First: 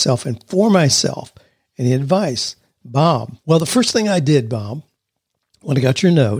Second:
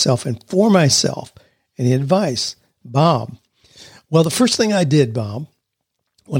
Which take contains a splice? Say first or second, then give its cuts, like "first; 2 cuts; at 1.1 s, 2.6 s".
first; 1 cut; at 3.4 s